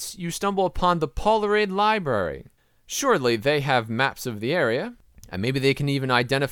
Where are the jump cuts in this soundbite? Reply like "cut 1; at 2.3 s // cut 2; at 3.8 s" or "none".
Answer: none

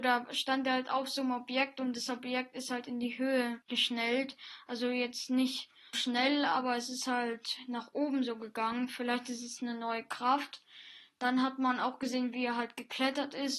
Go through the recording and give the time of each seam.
cut 1; at 3.6 s // cut 2; at 5.9 s

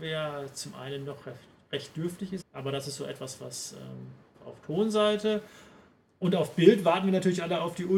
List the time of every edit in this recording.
cut 1; at 2.4 s // cut 2; at 4.3 s

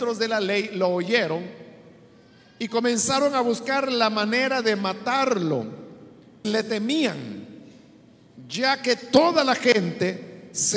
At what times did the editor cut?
cut 1; at 6.4 s

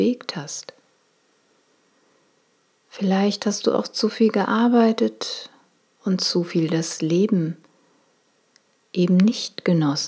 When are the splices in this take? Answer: none

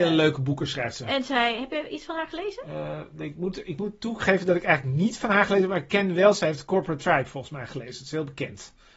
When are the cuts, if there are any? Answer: none

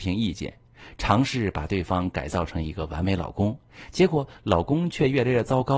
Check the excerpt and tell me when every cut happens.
none

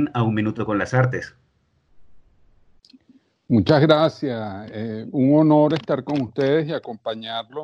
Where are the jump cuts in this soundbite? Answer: none

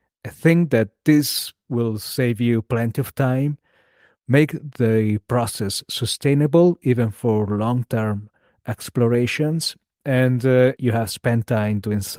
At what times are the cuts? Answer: cut 1; at 10.8 s

